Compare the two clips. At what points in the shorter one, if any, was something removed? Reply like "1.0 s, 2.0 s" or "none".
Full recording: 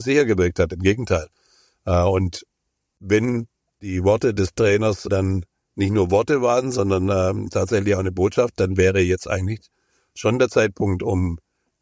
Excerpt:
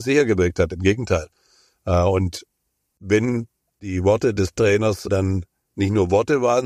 none